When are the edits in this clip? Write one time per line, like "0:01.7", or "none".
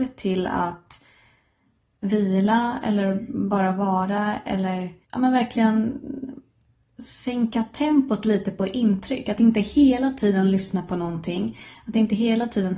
0:05.0